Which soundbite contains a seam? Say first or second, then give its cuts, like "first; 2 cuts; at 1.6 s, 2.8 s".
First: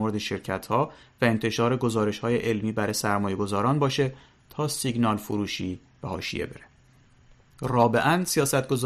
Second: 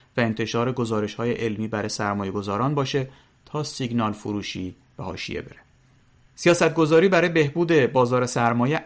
second; 1 cut; at 6.2 s